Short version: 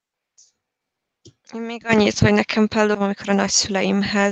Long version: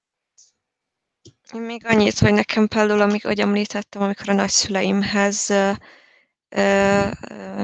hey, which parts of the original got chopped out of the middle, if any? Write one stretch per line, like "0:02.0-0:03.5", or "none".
0:02.9-0:03.9